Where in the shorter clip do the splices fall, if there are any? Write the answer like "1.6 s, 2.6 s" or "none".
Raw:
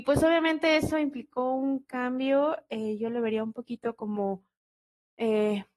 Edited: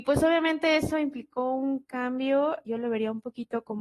2.7 s